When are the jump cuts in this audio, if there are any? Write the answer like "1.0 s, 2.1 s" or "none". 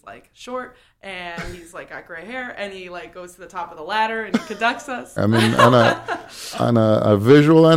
5.2 s